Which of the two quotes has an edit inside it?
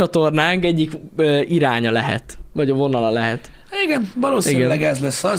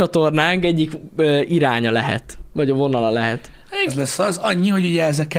second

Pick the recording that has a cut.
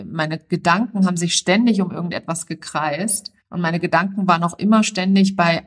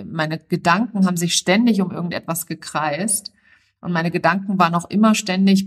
first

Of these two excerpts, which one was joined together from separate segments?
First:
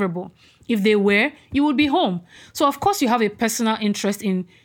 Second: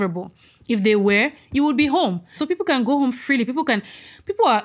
second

